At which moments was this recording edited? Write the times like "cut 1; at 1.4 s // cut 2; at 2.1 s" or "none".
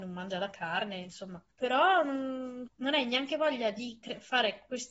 cut 1; at 1.5 s // cut 2; at 2.7 s

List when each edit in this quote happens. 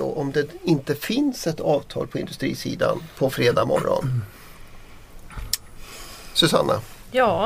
cut 1; at 3.1 s

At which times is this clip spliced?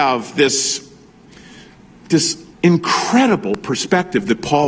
cut 1; at 2.5 s

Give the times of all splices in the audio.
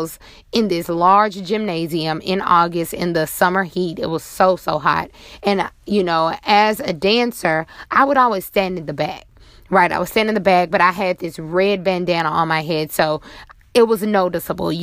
none

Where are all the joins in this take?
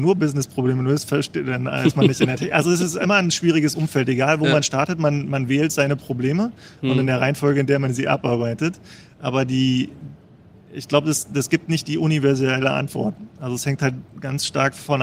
none

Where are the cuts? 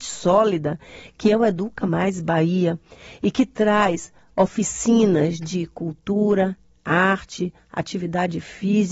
none

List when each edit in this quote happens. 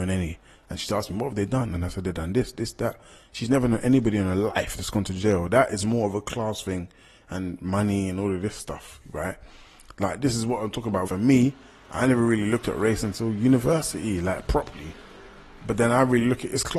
cut 1; at 10.0 s // cut 2; at 11.0 s

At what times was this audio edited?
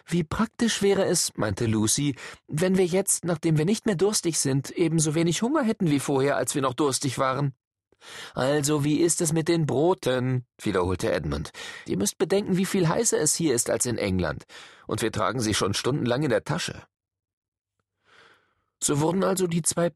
cut 1; at 11.9 s

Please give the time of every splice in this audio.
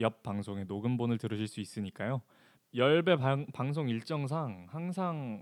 cut 1; at 2.6 s

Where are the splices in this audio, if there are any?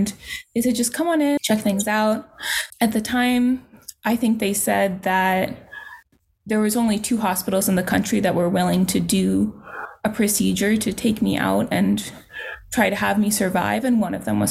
cut 1; at 1.4 s // cut 2; at 2.7 s

